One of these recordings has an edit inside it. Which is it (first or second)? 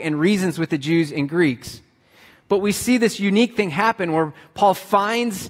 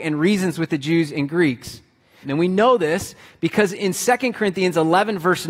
second